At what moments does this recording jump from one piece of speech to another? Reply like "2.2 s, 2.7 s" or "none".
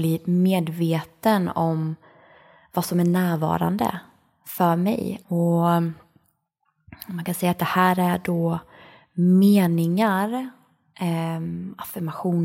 5.2 s